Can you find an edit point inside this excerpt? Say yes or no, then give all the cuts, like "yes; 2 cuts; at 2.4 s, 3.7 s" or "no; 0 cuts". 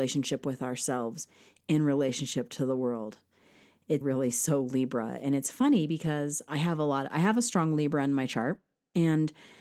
yes; 1 cut; at 4.0 s